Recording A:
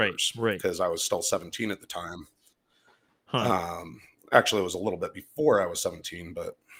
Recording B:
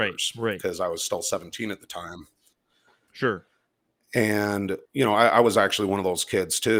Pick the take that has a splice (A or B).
B